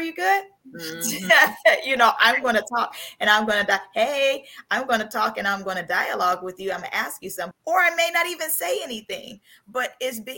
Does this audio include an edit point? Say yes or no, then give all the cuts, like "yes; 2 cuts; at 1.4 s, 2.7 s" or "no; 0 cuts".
yes; 1 cut; at 7.5 s